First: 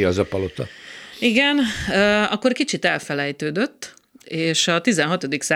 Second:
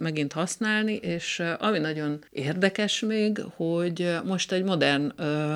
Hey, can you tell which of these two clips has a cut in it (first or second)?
second